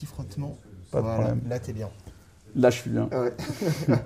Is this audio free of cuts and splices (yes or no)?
yes